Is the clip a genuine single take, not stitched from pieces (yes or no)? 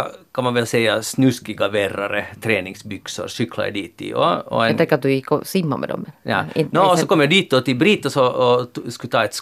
yes